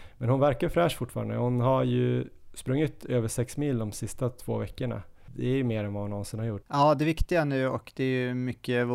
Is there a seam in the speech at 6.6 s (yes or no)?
yes